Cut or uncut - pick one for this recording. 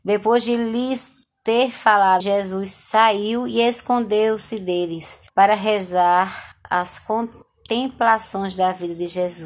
cut